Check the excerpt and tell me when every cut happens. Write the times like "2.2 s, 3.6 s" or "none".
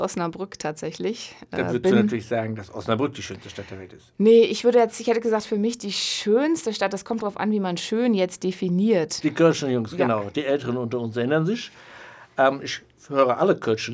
9.2 s